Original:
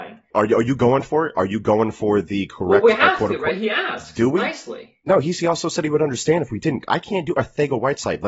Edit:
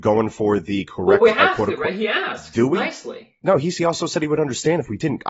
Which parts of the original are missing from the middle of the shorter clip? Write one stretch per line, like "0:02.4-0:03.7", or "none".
none